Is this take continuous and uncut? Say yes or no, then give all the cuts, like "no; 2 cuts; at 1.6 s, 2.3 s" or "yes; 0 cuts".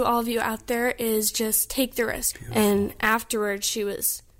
no; 1 cut; at 2.3 s